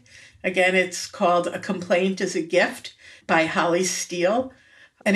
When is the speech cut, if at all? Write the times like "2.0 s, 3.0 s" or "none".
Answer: none